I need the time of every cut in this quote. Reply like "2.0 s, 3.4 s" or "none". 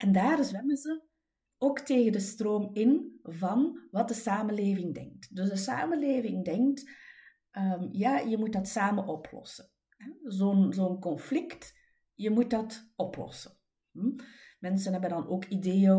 none